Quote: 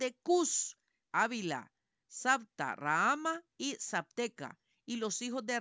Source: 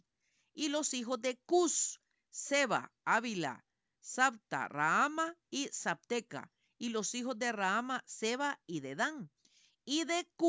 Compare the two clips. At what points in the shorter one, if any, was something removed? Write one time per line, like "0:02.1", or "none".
0:01.0